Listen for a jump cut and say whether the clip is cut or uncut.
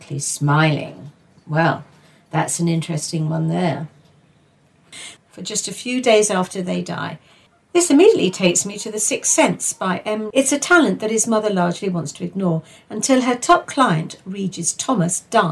cut